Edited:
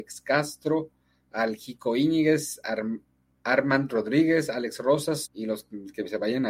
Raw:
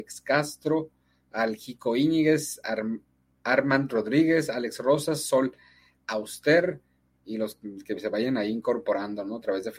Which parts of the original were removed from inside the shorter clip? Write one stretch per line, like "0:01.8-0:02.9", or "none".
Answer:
0:05.2-0:07.1

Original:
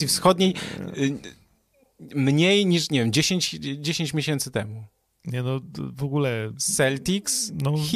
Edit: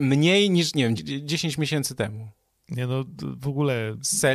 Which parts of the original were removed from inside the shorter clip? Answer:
0:03.1-0:03.5

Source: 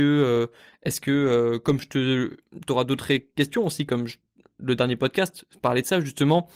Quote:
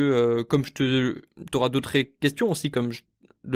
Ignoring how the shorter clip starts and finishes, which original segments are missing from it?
none

